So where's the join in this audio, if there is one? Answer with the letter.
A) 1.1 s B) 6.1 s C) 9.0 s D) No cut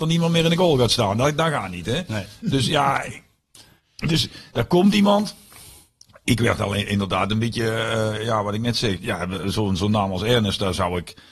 C